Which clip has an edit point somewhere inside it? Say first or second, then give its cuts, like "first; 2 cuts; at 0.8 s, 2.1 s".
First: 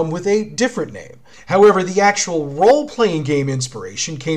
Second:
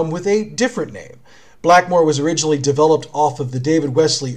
first; 1 cut; at 1.3 s